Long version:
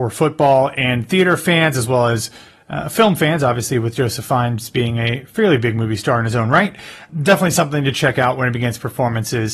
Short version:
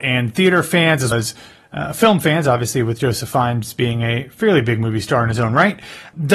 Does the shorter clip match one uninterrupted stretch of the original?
no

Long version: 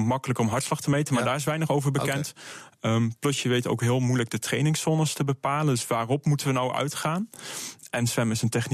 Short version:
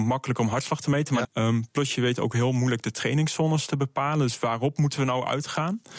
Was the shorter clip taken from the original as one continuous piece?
no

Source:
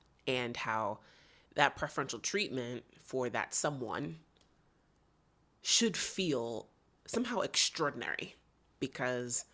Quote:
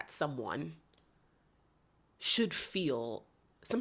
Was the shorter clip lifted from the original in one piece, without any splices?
yes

